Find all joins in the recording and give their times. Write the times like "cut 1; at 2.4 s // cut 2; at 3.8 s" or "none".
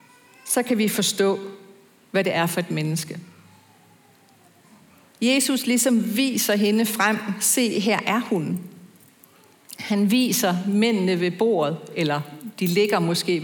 none